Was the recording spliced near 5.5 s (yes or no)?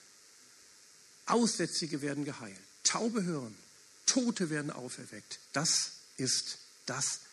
yes